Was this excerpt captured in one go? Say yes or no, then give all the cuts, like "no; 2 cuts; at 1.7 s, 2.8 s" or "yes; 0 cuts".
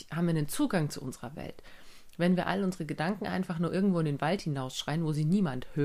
yes; 0 cuts